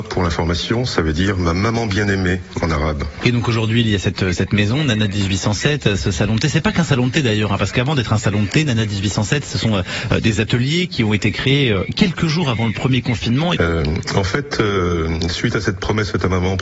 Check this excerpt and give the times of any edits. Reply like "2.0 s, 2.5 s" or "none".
3.2 s, 13.6 s

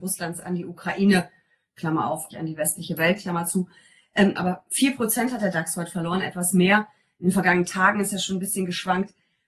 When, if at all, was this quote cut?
2.3 s, 4.4 s

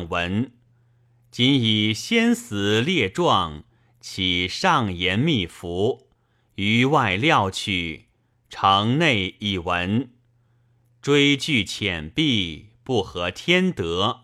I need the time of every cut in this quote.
none

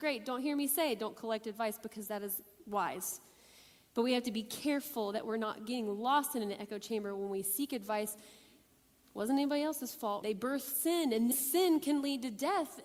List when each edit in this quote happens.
9.0 s, 10.2 s, 11.3 s

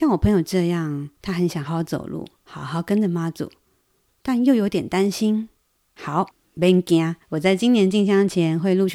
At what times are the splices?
1.7 s

